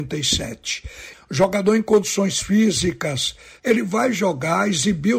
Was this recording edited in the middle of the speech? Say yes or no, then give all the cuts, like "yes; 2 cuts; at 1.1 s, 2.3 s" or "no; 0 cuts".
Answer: yes; 2 cuts; at 1.1 s, 3.6 s